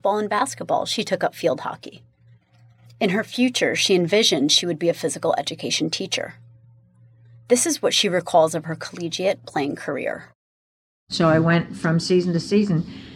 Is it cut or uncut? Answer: uncut